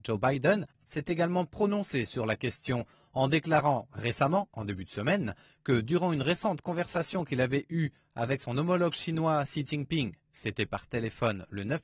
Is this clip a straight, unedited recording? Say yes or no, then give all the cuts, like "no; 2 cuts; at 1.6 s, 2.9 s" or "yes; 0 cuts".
yes; 0 cuts